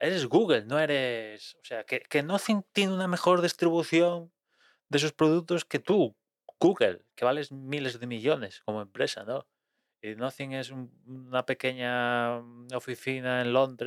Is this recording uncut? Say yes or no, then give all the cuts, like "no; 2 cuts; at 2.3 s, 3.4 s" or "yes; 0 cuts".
yes; 0 cuts